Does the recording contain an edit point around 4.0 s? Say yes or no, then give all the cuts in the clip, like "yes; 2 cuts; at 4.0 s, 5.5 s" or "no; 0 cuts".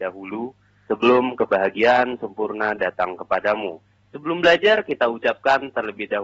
yes; 1 cut; at 4.0 s